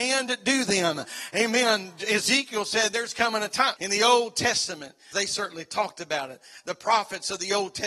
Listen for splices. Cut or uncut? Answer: cut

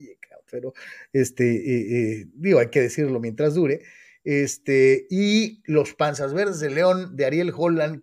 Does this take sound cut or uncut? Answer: uncut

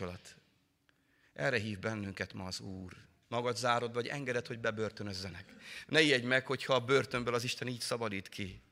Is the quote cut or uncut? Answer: cut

